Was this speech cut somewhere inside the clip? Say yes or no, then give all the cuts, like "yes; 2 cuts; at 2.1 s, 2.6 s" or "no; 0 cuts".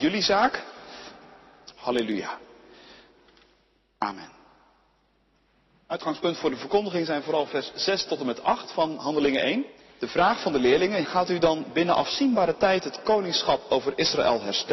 yes; 2 cuts; at 1.7 s, 11.0 s